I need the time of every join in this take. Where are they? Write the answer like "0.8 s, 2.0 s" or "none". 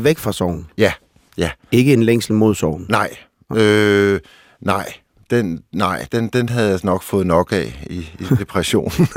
none